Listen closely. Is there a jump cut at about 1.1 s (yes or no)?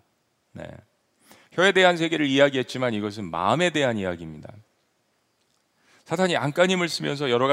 no